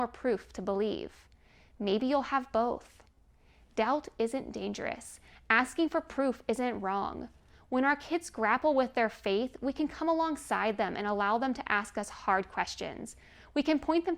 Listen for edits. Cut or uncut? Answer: uncut